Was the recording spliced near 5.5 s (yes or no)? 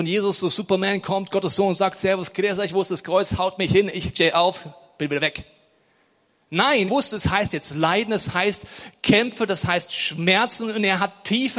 no